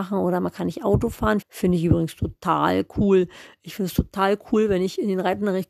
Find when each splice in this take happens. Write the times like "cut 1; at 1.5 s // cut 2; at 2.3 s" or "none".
cut 1; at 1.4 s